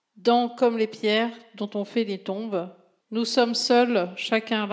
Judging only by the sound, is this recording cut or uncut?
cut